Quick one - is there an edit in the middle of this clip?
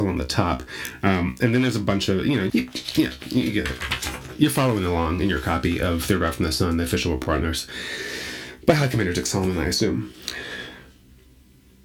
yes; 1 cut; at 2.5 s

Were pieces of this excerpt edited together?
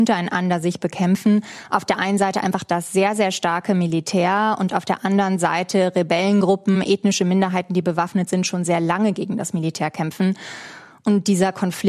no; 0 cuts

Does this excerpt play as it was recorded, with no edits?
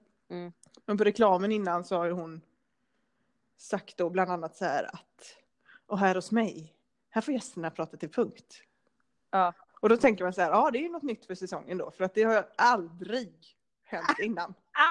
yes; 0 cuts

